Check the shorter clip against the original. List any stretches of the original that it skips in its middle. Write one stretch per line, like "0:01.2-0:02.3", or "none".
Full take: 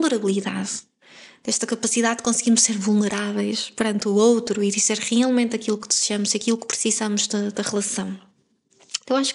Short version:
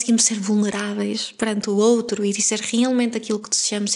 none